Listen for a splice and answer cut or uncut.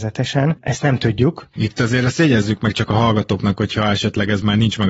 uncut